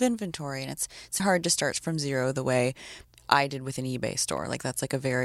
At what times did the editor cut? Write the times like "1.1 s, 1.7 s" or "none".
1.2 s